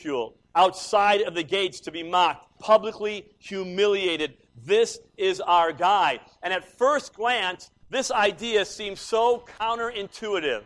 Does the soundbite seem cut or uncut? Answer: cut